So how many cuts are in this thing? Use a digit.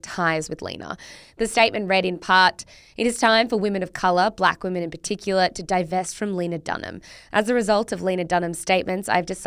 0